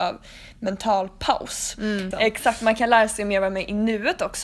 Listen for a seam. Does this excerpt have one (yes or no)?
yes